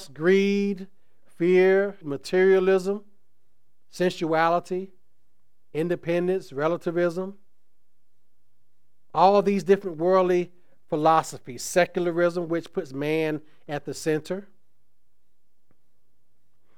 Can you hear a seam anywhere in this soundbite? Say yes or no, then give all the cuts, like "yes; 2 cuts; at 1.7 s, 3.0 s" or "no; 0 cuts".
yes; 1 cut; at 2.0 s